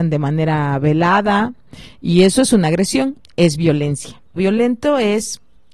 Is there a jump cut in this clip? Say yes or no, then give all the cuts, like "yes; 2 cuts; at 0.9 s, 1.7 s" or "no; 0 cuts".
yes; 1 cut; at 4.4 s